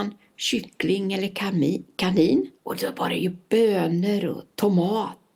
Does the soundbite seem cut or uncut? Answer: cut